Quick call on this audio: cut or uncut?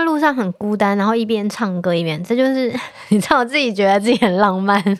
uncut